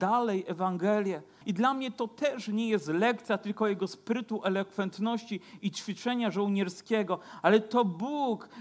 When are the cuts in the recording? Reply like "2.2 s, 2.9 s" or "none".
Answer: 1.4 s